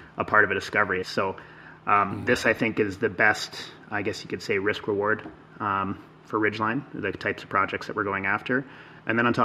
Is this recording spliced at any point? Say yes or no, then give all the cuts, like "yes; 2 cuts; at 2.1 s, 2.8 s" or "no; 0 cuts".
yes; 1 cut; at 1.0 s